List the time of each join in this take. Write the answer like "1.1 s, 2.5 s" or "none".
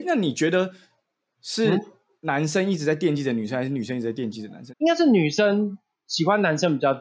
4.7 s